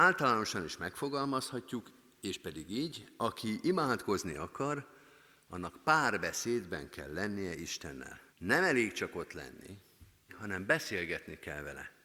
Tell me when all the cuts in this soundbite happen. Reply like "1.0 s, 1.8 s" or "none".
8.3 s, 10.3 s